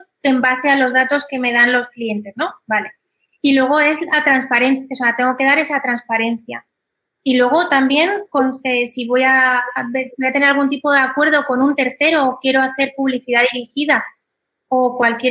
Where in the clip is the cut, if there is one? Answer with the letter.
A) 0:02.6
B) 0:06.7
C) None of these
C